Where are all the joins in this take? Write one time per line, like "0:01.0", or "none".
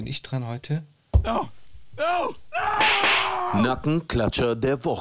none